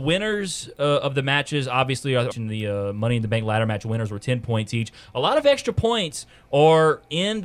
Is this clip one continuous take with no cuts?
no; 1 cut; at 2.3 s

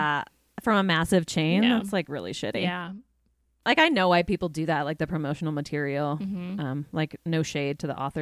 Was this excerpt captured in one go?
yes; 0 cuts

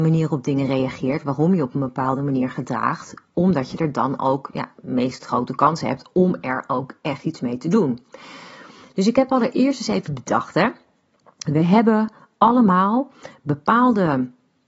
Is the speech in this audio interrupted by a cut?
no; 0 cuts

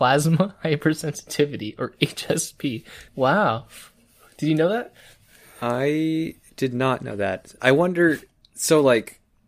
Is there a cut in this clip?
yes; 1 cut; at 3.1 s

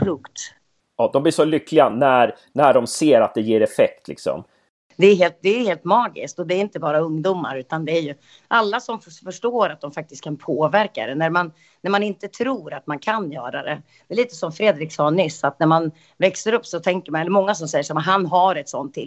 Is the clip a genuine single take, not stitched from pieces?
yes; 0 cuts

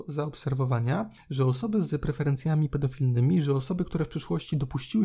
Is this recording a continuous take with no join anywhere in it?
yes; 0 cuts

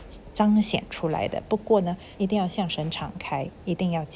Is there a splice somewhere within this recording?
yes; 1 cut; at 2.2 s

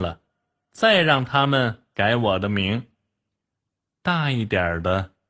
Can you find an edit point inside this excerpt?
no; 0 cuts

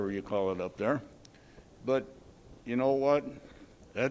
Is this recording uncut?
no; 1 cut; at 1.7 s

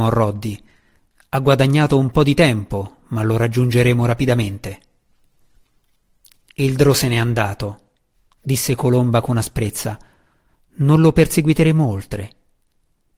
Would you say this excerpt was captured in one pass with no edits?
yes; 0 cuts

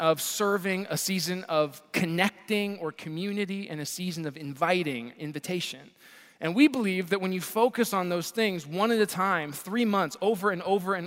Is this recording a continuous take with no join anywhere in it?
yes; 0 cuts

